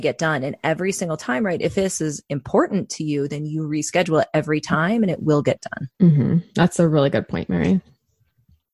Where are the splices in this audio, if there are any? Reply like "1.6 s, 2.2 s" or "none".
5.9 s